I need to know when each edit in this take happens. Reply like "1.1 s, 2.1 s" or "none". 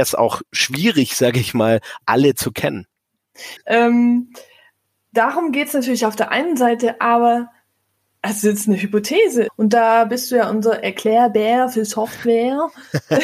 3.6 s, 9.5 s